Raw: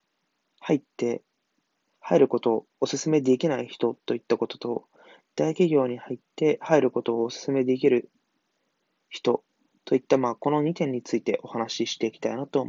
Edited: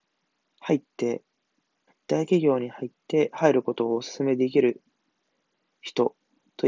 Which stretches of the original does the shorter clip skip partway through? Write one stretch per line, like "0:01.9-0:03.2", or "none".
0:01.9-0:05.2